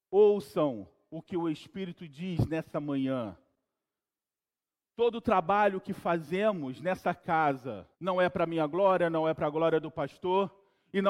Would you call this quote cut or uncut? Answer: cut